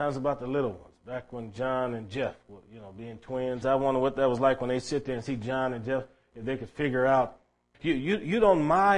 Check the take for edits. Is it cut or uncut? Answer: cut